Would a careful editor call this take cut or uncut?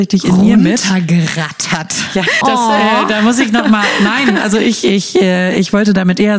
cut